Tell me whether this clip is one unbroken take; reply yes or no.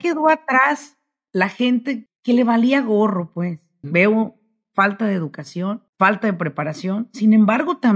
no